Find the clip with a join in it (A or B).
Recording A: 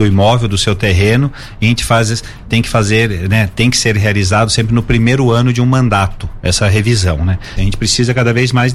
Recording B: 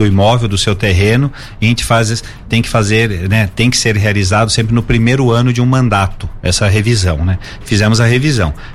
A